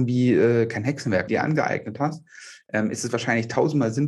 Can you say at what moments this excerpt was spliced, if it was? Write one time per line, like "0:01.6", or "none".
0:01.3